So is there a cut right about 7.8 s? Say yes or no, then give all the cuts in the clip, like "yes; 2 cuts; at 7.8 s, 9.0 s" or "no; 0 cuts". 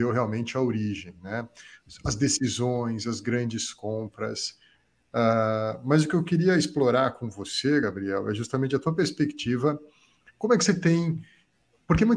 no; 0 cuts